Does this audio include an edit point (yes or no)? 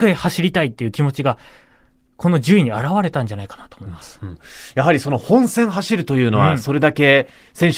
no